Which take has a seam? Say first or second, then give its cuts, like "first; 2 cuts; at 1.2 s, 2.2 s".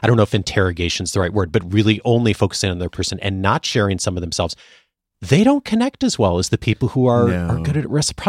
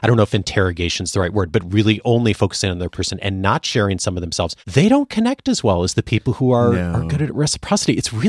second; 1 cut; at 4.6 s